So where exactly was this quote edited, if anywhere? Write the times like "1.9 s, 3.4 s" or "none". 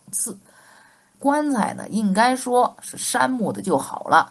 1.1 s